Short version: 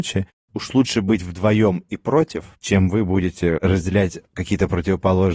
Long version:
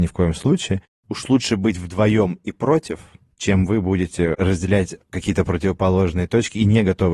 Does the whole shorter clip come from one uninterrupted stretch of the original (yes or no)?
no